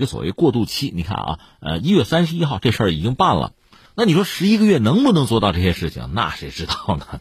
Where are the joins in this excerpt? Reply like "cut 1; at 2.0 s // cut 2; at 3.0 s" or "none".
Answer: cut 1; at 3.9 s